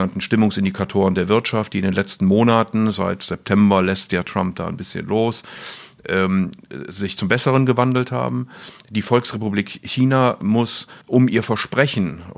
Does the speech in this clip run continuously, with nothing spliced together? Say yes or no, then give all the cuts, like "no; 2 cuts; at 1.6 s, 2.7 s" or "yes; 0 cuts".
no; 1 cut; at 11.0 s